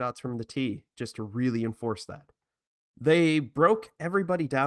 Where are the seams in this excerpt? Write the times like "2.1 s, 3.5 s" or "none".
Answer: 2.8 s